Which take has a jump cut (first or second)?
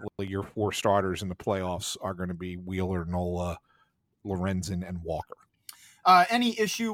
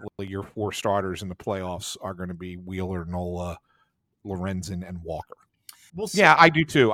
second